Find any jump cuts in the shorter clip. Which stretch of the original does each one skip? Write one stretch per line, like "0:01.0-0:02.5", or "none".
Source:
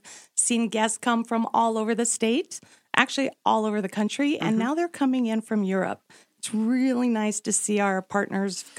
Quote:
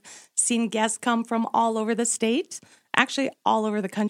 none